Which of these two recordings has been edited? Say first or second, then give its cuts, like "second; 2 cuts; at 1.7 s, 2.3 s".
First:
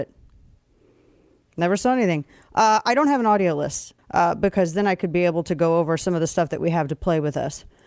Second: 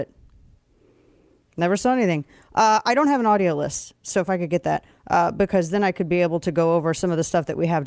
first; 1 cut; at 4.0 s